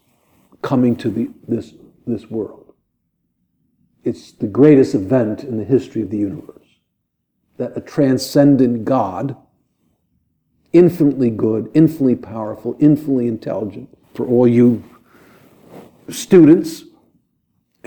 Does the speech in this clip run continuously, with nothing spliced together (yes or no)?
no